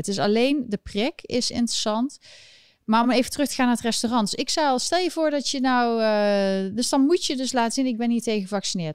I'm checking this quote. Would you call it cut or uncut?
uncut